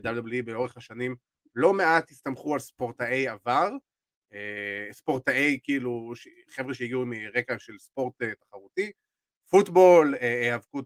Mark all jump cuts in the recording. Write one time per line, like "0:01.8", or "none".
none